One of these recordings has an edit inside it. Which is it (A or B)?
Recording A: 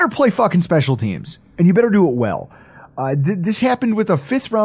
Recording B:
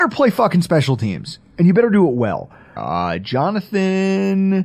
B